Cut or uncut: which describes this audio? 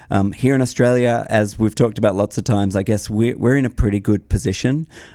uncut